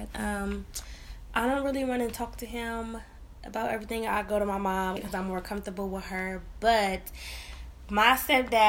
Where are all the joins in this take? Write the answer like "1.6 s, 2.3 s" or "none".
5.0 s